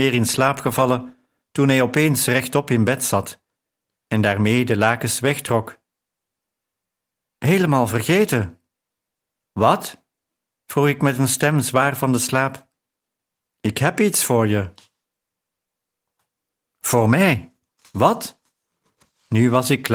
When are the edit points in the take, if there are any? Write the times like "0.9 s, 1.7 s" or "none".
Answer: none